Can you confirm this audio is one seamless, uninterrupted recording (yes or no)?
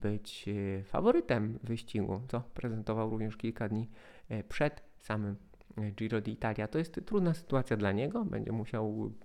no